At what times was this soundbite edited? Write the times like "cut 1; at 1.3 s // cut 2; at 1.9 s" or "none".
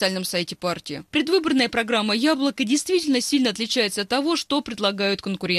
none